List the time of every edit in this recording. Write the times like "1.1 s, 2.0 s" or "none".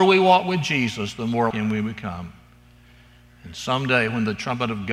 1.5 s

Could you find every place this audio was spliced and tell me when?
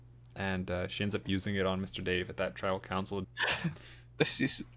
3.2 s

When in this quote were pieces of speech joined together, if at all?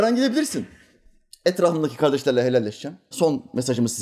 3.1 s

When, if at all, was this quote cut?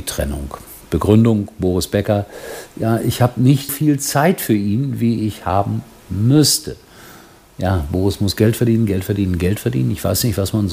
3.7 s

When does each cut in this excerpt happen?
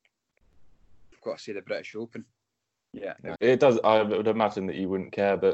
3.4 s

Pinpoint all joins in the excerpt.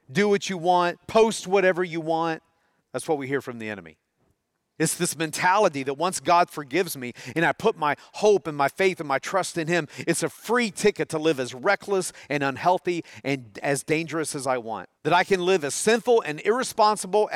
2.8 s, 4.8 s, 15.0 s

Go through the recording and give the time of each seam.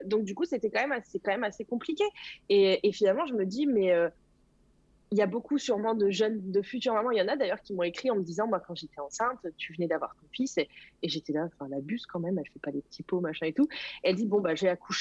none

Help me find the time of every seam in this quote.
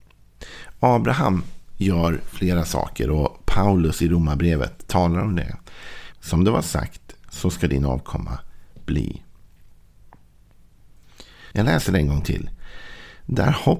6.1 s, 11.5 s

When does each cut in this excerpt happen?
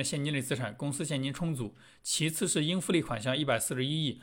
none

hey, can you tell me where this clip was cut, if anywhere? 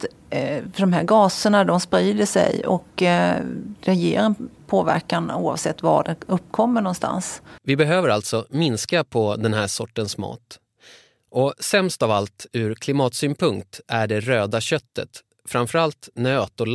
7.6 s

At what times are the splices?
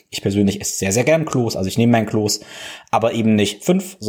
none

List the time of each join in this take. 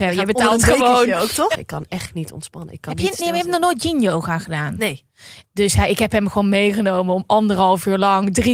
1.5 s, 5.4 s

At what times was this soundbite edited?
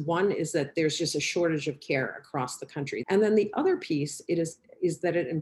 3.0 s

